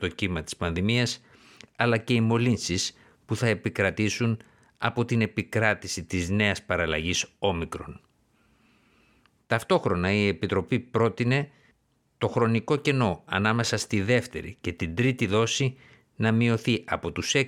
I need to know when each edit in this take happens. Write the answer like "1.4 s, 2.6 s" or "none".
none